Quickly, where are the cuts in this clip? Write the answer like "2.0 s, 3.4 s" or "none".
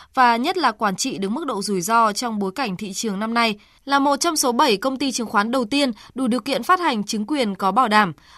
3.8 s